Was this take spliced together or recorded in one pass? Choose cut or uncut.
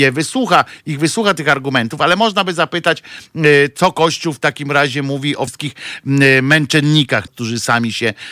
cut